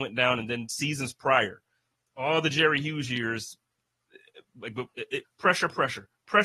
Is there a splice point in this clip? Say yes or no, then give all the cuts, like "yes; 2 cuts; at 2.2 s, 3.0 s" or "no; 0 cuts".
yes; 1 cut; at 5.2 s